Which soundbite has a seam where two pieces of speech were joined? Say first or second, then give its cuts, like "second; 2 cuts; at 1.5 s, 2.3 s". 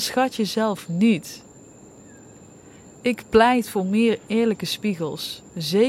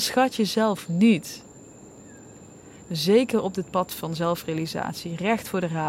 second; 1 cut; at 2.8 s